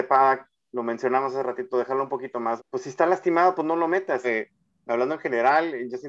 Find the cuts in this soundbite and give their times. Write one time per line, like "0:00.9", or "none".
0:02.6
0:04.2